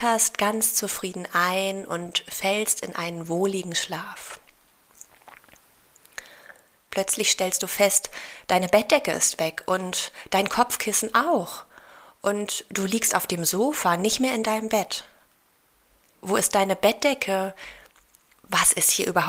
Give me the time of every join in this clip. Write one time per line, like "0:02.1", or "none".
0:06.8
0:16.2